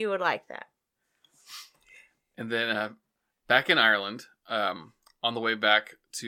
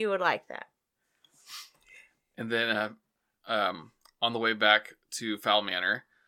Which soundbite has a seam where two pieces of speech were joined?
second; 1 cut; at 3.3 s

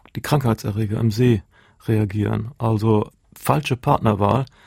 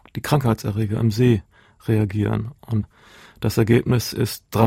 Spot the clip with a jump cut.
first; 1 cut; at 2.6 s

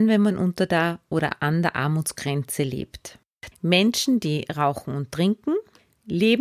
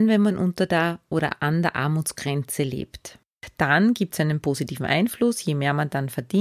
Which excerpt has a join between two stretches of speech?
first; 1 cut; at 3.5 s

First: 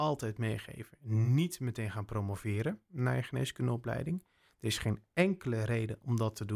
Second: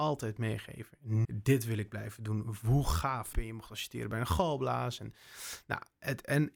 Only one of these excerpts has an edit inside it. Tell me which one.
second; 2 cuts; at 1.2 s, 3.3 s

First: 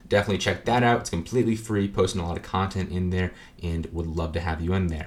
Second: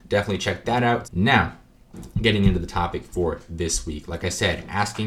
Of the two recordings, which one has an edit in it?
second; 1 cut; at 1.0 s

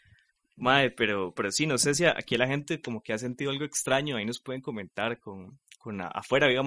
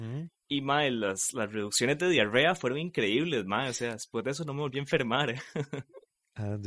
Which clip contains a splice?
first; 1 cut; at 1.4 s

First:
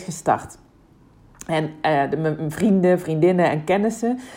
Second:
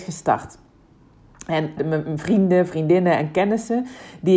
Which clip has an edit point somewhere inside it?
second; 1 cut; at 1.8 s

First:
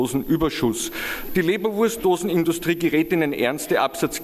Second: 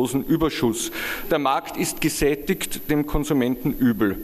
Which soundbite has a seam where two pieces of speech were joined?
first; 1 cut; at 1.3 s

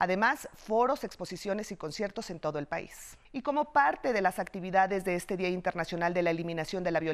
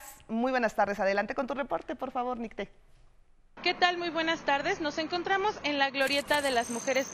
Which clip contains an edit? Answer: first; 1 cut; at 3.2 s

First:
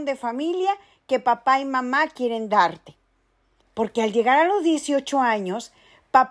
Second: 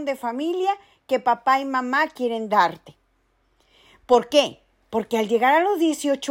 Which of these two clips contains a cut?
first; 1 cut; at 3.6 s

